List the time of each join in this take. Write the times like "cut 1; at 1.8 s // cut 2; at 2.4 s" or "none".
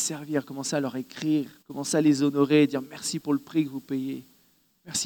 cut 1; at 1.6 s